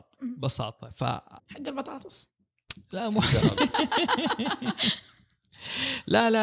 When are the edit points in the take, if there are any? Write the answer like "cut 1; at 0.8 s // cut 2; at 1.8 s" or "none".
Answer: cut 1; at 1.4 s